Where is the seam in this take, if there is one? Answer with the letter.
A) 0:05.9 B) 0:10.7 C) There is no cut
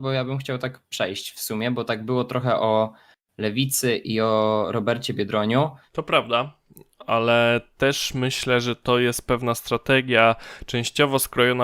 A